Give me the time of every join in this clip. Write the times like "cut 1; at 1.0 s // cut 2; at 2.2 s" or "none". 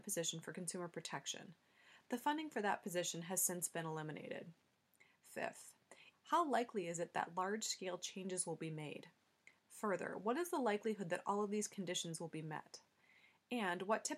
cut 1; at 6.1 s